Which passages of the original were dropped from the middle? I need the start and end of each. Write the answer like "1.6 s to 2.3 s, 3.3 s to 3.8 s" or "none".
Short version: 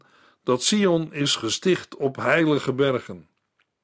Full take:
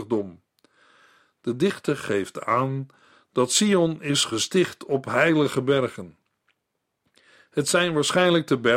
none